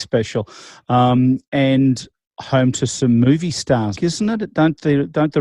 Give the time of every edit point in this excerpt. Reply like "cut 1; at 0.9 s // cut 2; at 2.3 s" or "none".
cut 1; at 4.0 s

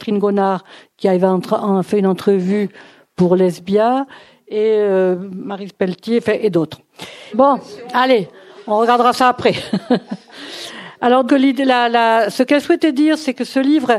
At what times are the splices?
cut 1; at 7.3 s // cut 2; at 11.3 s

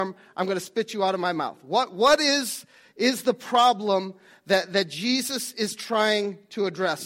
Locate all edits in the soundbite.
none

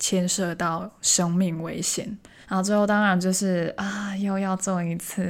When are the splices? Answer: cut 1; at 2.4 s

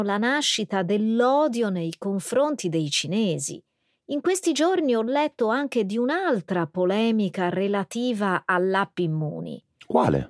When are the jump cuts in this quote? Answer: none

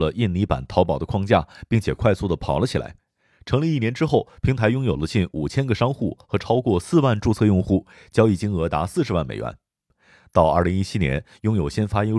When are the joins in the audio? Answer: none

